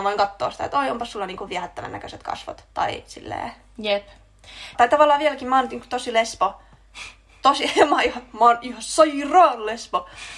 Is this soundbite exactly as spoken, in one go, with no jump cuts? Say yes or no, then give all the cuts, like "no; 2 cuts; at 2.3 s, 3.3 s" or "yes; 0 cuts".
no; 2 cuts; at 2.7 s, 4.7 s